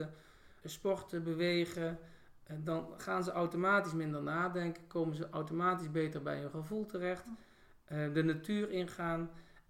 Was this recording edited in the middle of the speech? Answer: no; 0 cuts

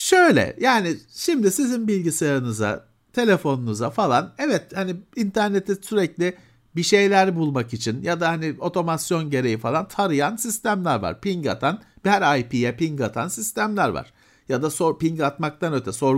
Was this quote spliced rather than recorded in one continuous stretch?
no; 0 cuts

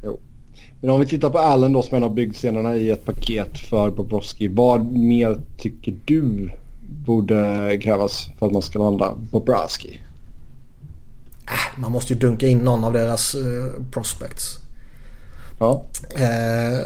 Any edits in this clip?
yes; 1 cut; at 15.6 s

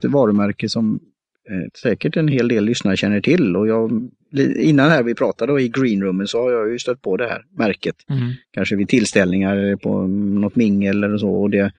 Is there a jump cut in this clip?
no; 0 cuts

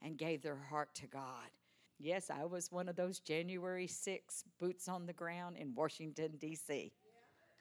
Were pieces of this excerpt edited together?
yes; 1 cut; at 1.9 s

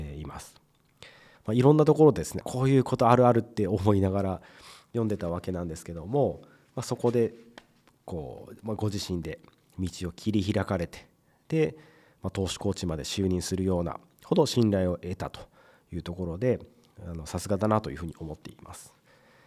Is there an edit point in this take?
yes; 2 cuts; at 1.3 s, 2.4 s

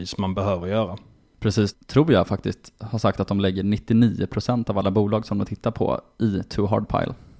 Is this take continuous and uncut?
no; 1 cut; at 1.7 s

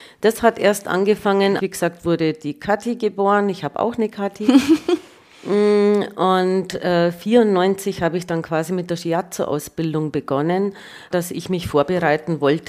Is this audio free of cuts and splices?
no; 2 cuts; at 1.6 s, 11.1 s

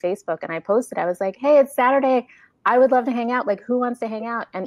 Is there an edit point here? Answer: no; 0 cuts

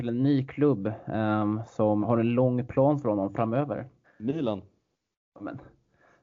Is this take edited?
yes; 2 cuts; at 2.0 s, 4.0 s

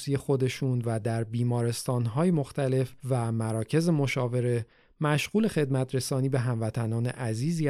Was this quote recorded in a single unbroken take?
no; 1 cut; at 3.0 s

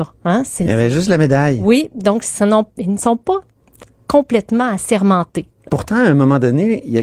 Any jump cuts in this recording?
no; 0 cuts

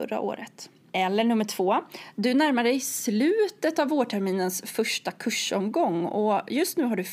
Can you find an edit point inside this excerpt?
yes; 1 cut; at 0.9 s

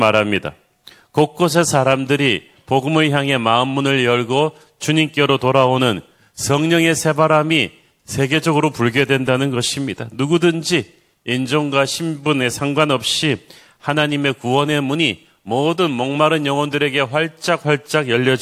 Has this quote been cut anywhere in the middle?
no; 0 cuts

